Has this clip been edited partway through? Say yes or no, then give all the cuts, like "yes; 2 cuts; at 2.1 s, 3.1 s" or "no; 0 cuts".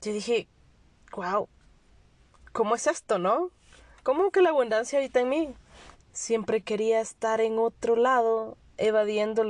yes; 1 cut; at 5.9 s